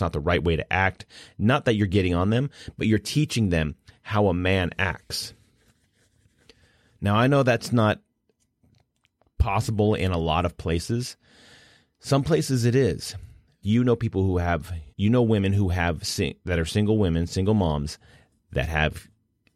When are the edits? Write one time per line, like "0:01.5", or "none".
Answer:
0:13.6
0:14.9

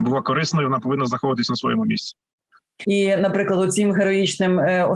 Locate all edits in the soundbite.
0:02.8

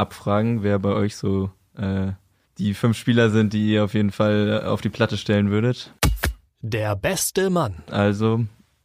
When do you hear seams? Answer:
0:02.5

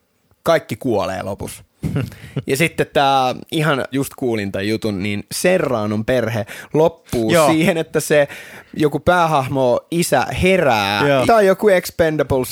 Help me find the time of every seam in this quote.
0:03.9
0:11.3

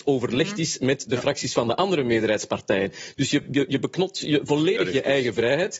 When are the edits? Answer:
none

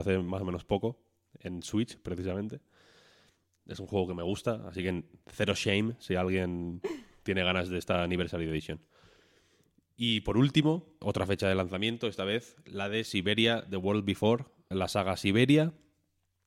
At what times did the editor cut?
0:11.0
0:14.7

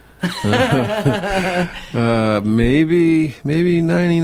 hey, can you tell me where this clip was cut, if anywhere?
none

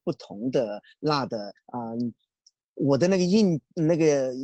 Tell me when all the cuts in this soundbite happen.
0:01.6

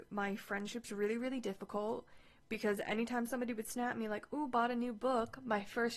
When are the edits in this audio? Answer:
none

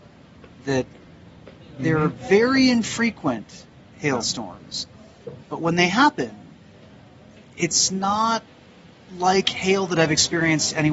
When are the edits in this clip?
none

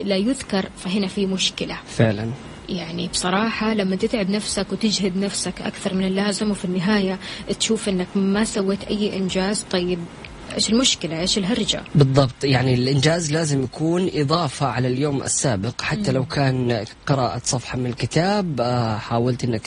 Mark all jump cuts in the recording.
0:10.5

